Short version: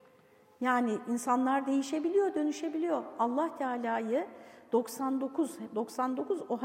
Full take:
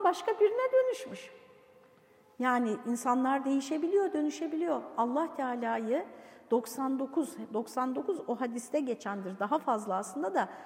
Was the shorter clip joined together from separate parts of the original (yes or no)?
no